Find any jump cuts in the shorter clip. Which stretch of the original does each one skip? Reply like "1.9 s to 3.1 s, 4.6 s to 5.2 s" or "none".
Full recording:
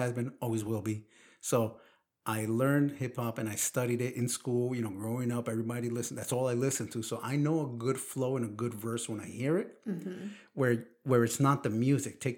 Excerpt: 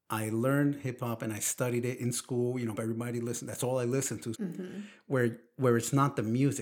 4.9 s to 5.4 s, 7.0 s to 9.8 s